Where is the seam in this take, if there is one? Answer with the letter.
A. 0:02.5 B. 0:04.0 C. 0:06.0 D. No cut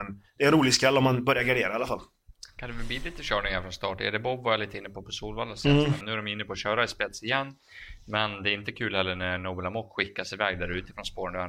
C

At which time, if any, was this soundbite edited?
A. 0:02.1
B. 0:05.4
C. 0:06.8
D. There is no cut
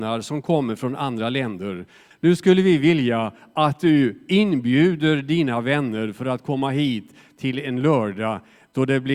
A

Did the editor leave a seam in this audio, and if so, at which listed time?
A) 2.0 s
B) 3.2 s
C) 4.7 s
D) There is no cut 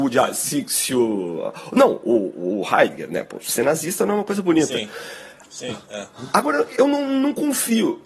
D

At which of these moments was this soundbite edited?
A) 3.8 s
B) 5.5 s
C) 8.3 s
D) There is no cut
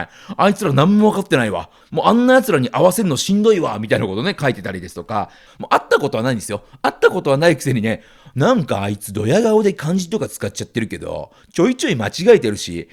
B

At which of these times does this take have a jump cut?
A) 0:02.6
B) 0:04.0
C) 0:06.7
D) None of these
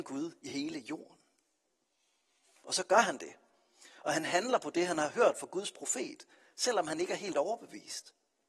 A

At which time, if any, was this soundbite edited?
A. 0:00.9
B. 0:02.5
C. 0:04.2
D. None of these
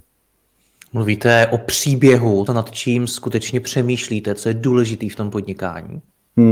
B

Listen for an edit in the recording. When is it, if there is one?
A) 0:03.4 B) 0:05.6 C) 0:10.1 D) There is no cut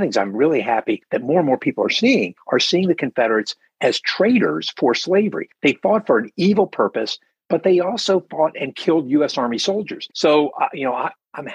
C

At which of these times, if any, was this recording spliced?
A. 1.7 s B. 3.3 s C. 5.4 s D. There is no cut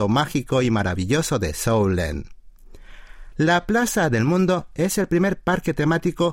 B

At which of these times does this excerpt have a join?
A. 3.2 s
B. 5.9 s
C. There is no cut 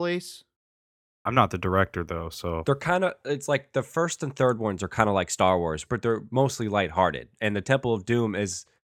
B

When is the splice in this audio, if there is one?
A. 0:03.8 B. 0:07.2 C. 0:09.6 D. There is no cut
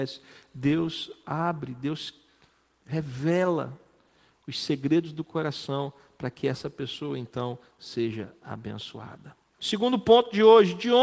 C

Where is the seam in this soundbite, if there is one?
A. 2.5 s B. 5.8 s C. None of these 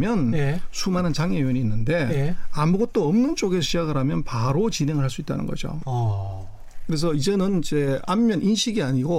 B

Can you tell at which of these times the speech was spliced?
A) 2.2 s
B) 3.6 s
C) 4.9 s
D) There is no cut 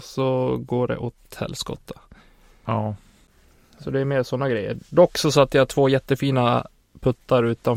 D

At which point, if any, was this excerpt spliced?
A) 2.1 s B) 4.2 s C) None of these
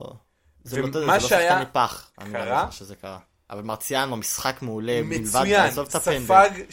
A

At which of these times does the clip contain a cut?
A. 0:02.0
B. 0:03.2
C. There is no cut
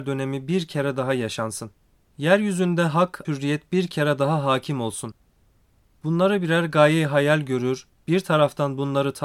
B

